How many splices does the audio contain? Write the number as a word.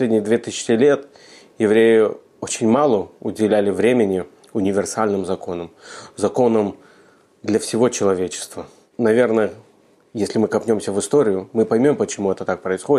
zero